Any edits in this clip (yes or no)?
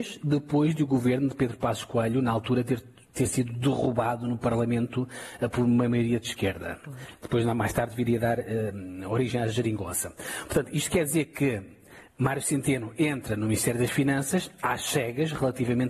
no